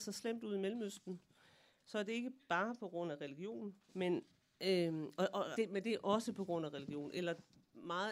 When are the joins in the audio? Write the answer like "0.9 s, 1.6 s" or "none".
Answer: 3.8 s, 5.5 s